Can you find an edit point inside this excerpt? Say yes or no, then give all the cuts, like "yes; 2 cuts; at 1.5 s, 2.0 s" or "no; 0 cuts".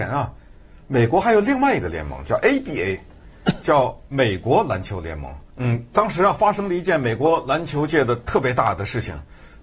yes; 1 cut; at 5.5 s